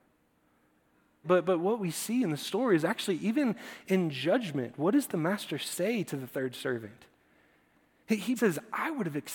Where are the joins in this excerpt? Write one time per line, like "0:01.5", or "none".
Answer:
0:01.2
0:08.4